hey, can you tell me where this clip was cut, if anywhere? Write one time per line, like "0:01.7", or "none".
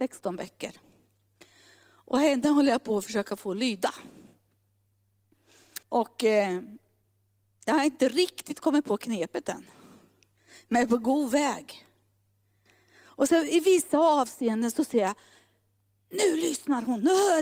0:05.8